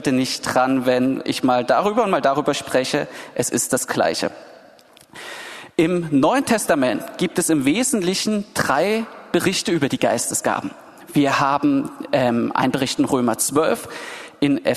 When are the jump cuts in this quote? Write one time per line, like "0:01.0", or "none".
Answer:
none